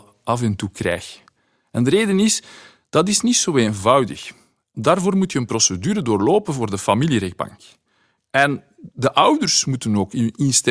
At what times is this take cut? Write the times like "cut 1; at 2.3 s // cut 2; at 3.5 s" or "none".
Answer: cut 1; at 8.2 s

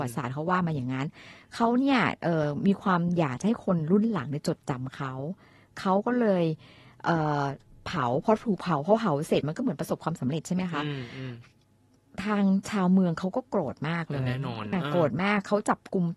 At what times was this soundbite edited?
cut 1; at 14.7 s

